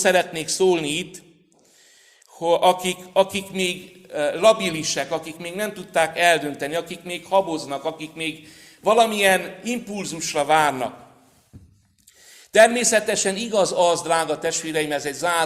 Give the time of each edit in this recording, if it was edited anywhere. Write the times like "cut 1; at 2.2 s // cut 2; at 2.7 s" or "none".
none

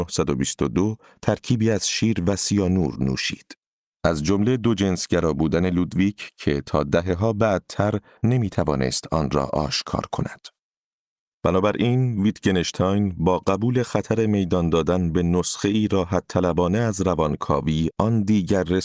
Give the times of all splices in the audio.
cut 1; at 3.9 s

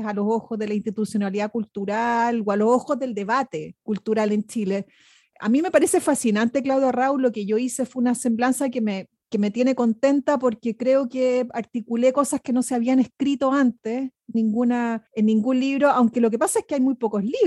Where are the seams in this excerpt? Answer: cut 1; at 14.3 s

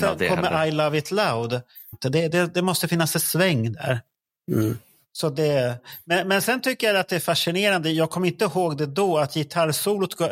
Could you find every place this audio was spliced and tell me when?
cut 1; at 1.9 s

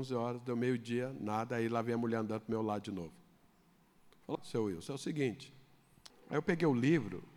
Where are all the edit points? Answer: cut 1; at 4.4 s // cut 2; at 6.1 s

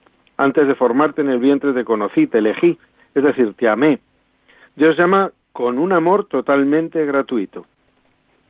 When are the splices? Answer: none

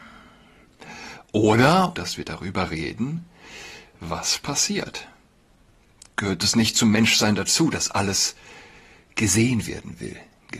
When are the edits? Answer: cut 1; at 1.9 s

